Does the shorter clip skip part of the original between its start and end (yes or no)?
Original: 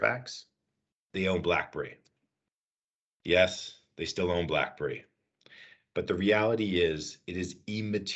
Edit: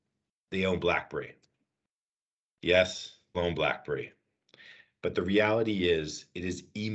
yes